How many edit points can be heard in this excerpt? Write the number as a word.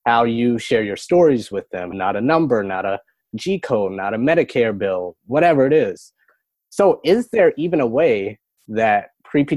one